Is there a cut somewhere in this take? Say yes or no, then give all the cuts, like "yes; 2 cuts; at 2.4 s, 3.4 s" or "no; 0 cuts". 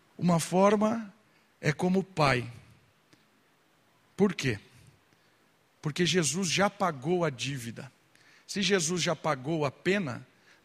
no; 0 cuts